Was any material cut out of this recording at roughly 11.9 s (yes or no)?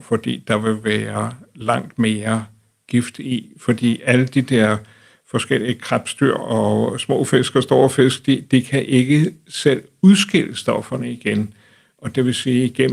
no